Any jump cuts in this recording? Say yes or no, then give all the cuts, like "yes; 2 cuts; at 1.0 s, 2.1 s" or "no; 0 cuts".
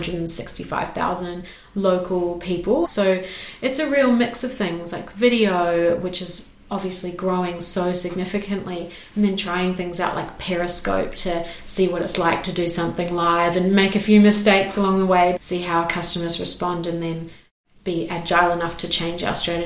yes; 2 cuts; at 2.8 s, 15.4 s